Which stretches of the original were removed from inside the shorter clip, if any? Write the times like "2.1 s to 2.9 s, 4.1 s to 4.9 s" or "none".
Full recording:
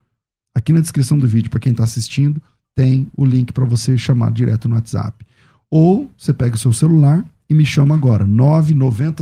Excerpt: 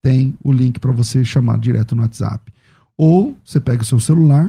none